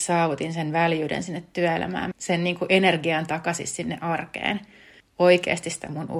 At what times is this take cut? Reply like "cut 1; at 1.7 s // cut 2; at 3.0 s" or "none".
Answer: cut 1; at 2.1 s // cut 2; at 5.0 s